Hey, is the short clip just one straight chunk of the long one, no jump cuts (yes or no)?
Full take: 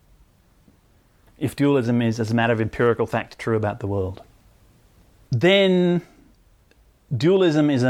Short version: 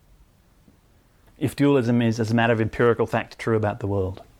yes